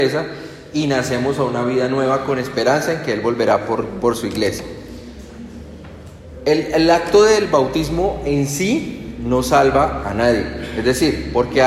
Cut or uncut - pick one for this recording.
uncut